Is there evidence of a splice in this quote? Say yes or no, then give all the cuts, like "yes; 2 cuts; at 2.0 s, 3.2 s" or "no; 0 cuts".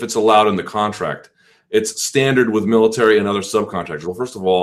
no; 0 cuts